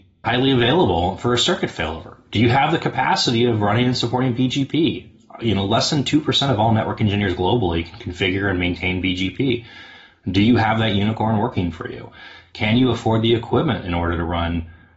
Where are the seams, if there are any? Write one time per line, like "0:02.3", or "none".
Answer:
none